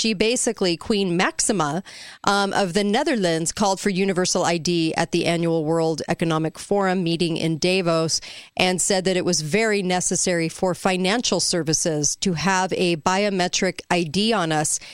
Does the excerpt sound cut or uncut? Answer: uncut